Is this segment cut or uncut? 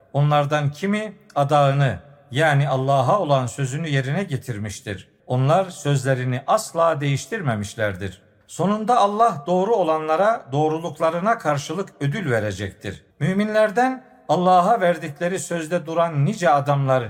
cut